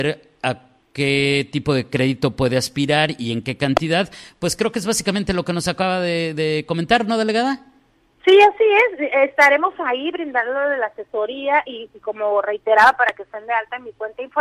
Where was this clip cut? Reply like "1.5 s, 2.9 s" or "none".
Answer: none